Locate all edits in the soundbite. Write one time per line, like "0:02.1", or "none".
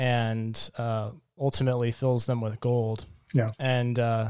none